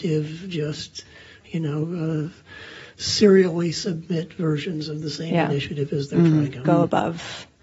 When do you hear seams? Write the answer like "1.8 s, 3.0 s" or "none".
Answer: 6.6 s

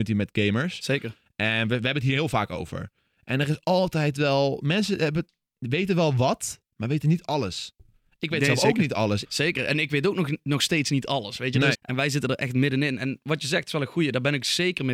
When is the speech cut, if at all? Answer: 9.2 s, 11.7 s

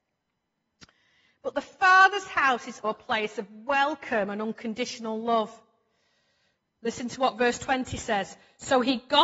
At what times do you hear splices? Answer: 2.8 s

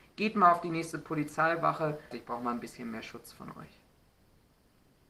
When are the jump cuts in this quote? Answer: 2.1 s

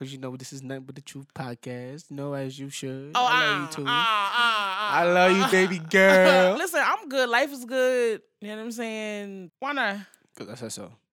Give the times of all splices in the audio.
5.5 s, 6.6 s, 9.5 s

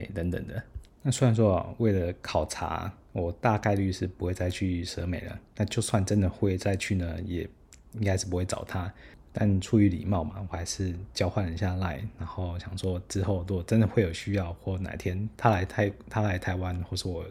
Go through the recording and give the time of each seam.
none

